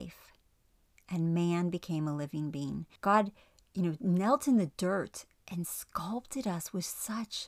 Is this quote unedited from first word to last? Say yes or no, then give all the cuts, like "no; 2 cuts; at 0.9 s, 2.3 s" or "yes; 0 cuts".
no; 1 cut; at 3.0 s